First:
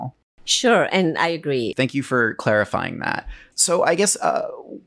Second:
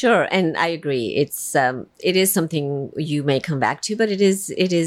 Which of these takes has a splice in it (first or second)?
first